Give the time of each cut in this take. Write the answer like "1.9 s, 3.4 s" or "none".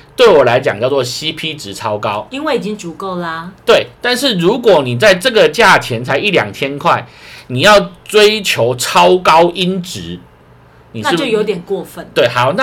none